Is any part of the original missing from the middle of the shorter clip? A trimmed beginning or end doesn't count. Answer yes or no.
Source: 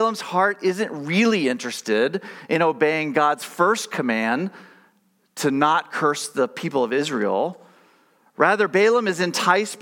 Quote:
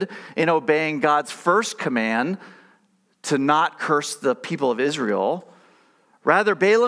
no